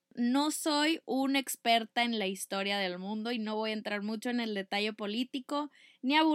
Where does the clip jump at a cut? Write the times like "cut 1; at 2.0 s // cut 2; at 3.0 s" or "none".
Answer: none